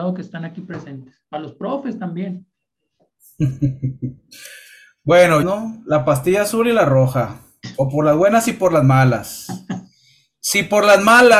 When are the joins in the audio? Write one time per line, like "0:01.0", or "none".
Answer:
0:05.4